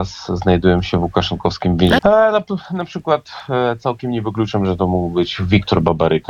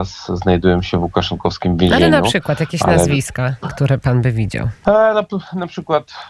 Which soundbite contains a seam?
first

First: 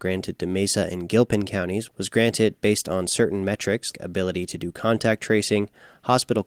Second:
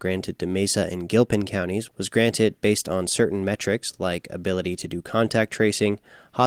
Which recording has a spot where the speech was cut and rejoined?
first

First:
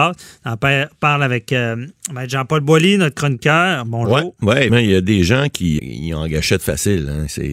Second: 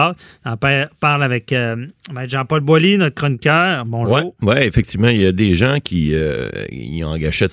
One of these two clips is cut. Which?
first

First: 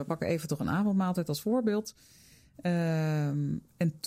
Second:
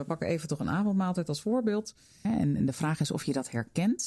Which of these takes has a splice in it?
second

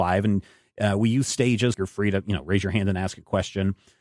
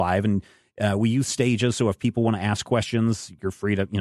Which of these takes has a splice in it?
first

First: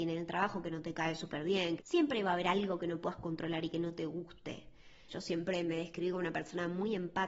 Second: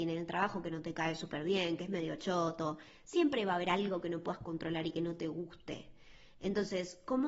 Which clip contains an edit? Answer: first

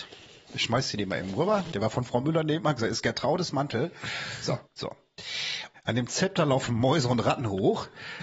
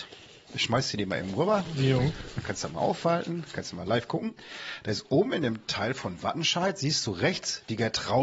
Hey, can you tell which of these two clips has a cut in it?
first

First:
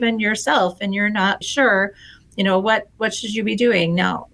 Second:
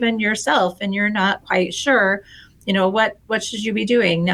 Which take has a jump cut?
first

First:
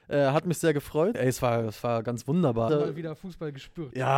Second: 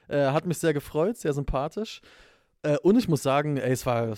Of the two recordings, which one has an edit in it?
first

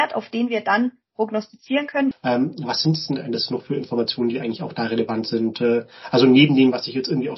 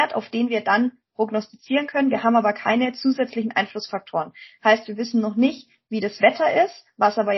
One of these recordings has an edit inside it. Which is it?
first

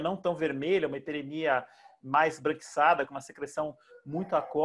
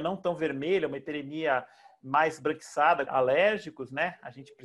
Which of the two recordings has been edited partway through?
second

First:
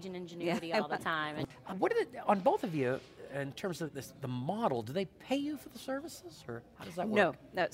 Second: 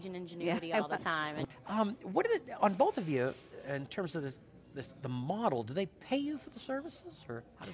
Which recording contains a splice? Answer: first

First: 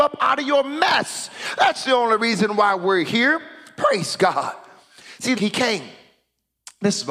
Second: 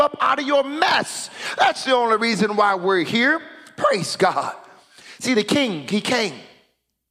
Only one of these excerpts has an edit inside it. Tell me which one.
first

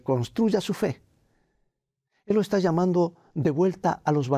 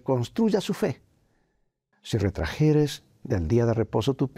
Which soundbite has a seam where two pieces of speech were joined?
second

